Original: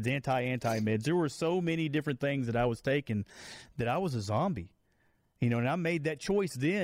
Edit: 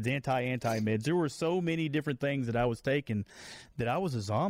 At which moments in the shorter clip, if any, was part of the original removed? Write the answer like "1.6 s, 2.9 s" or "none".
none